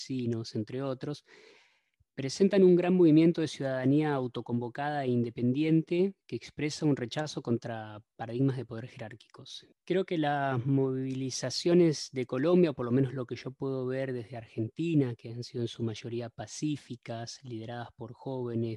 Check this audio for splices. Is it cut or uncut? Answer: cut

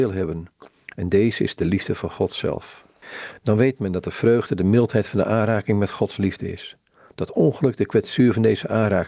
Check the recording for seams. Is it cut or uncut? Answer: uncut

